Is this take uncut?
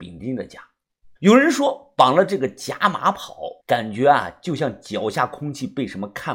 no; 2 cuts; at 1.2 s, 3.6 s

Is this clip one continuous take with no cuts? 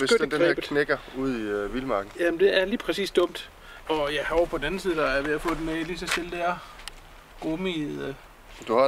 no; 1 cut; at 3.9 s

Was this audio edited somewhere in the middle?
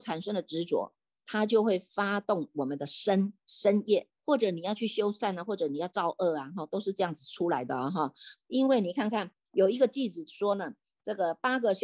yes; 2 cuts; at 4.2 s, 8.4 s

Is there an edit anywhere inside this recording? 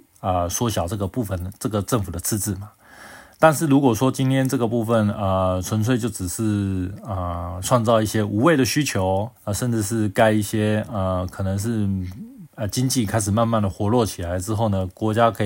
yes; 2 cuts; at 9.4 s, 12.5 s

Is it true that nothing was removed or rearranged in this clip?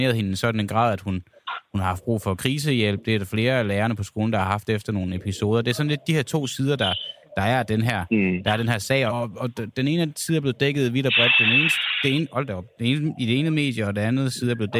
no; 1 cut; at 9.1 s

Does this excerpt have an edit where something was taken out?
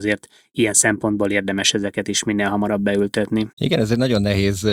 yes; 1 cut; at 3.5 s

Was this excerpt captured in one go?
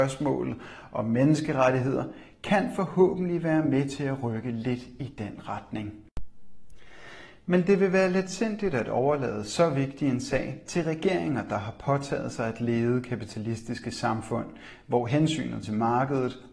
yes; 0 cuts

